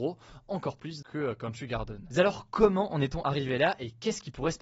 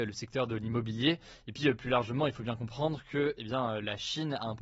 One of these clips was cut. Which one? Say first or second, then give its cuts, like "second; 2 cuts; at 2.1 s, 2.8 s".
first; 1 cut; at 1.0 s